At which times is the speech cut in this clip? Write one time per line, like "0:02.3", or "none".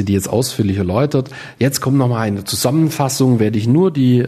none